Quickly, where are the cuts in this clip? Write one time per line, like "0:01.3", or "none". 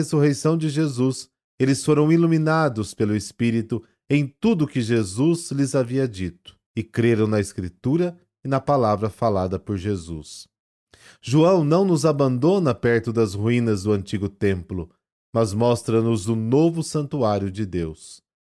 0:06.6